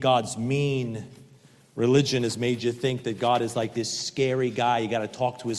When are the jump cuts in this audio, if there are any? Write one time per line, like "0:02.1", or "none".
none